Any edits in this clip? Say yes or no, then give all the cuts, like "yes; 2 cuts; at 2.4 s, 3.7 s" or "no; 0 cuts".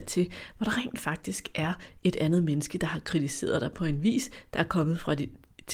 no; 0 cuts